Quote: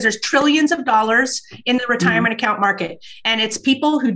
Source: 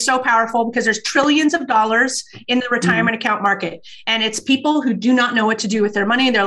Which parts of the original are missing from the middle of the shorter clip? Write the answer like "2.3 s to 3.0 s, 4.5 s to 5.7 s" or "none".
none